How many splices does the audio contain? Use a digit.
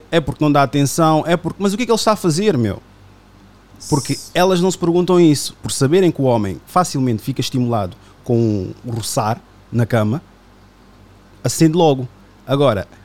2